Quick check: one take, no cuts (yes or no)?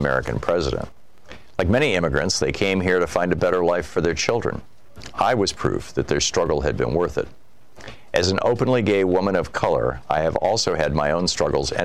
yes